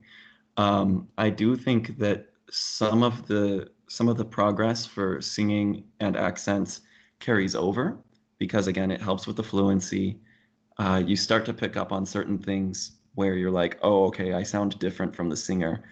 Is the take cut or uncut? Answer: uncut